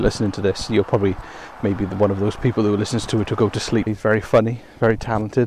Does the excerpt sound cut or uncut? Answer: cut